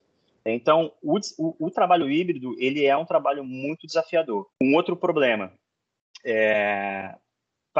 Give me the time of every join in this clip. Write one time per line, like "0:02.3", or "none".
0:04.5